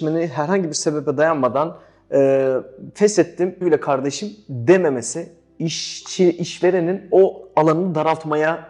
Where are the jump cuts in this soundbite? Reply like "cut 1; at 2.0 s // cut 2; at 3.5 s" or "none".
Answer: cut 1; at 3.6 s